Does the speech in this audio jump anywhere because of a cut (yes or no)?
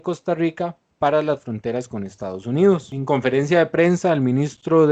no